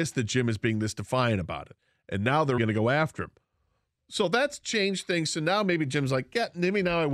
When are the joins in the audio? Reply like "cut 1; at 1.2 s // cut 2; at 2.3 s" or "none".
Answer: cut 1; at 2.6 s